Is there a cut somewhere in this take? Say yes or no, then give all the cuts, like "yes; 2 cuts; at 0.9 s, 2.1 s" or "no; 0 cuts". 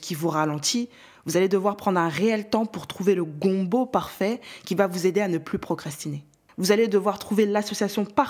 no; 0 cuts